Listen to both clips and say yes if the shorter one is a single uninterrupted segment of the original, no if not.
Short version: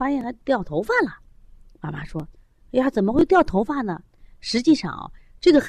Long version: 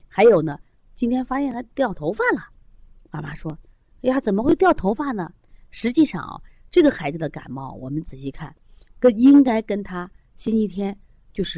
yes